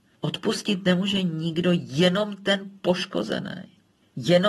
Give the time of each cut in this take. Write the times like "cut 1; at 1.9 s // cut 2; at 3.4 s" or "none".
none

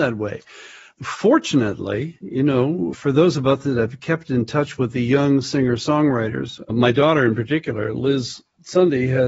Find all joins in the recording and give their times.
cut 1; at 0.9 s // cut 2; at 2.9 s // cut 3; at 6.7 s

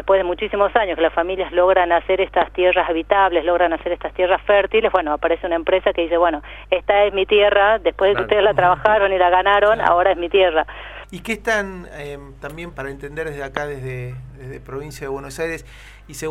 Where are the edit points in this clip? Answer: cut 1; at 11.0 s // cut 2; at 12.7 s

